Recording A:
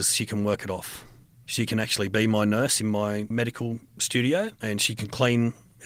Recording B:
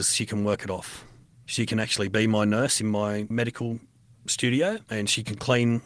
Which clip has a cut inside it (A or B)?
A